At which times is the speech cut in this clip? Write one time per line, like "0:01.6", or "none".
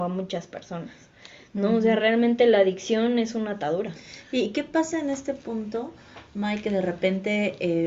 none